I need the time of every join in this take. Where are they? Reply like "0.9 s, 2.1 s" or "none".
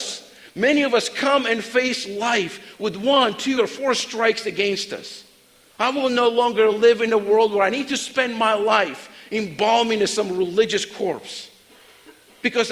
3.6 s, 5.7 s

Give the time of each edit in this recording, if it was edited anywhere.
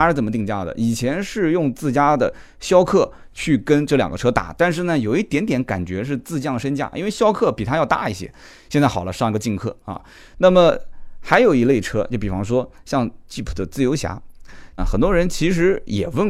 14.8 s

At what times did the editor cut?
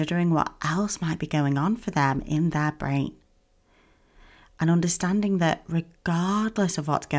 none

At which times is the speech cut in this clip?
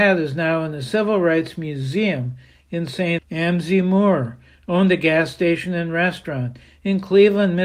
3.2 s

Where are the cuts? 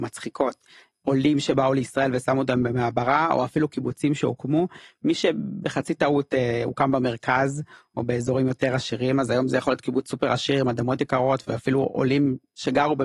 none

